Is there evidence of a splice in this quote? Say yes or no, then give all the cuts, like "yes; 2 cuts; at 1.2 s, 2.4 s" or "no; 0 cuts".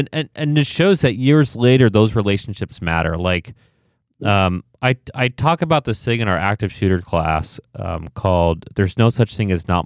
no; 0 cuts